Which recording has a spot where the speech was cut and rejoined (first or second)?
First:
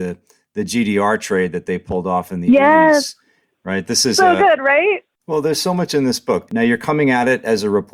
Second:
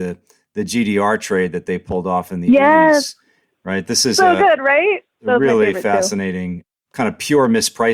first